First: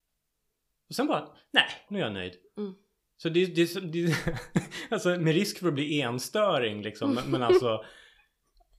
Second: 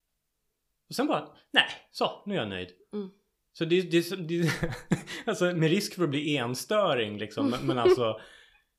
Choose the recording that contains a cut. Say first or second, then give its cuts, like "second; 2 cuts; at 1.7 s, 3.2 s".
first; 1 cut; at 1.9 s